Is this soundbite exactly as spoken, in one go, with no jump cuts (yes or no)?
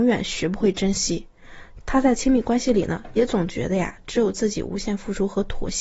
no